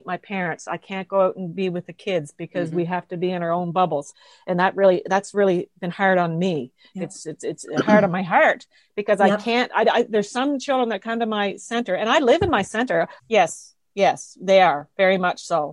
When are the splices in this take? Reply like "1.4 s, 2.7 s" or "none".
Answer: 7.2 s, 13.2 s